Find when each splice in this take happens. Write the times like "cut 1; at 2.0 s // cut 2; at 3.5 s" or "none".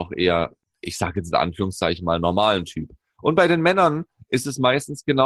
none